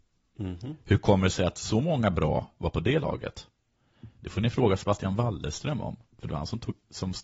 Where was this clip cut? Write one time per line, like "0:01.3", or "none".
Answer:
none

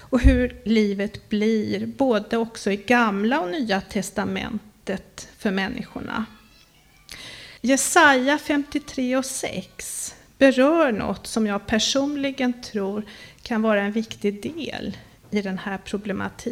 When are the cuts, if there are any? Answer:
0:07.6

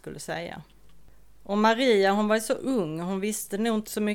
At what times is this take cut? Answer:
none

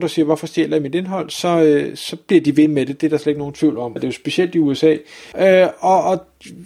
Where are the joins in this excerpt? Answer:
0:04.0
0:05.3

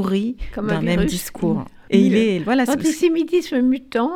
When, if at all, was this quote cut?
0:01.9

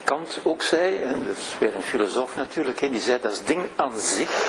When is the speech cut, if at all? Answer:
none

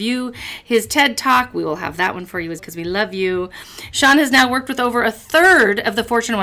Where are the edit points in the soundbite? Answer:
0:02.6
0:03.9

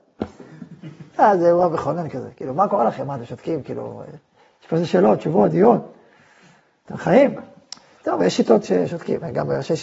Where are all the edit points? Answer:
none

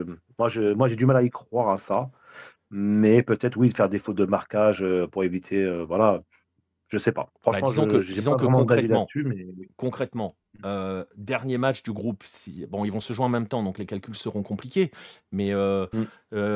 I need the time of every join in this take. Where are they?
none

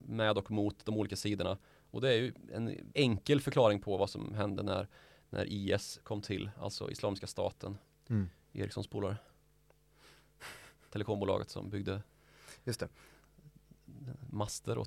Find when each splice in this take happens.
none

